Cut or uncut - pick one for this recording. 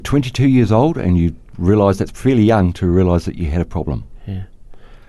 uncut